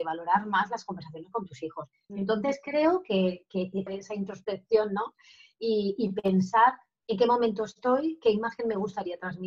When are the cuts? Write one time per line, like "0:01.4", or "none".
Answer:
0:02.1
0:03.9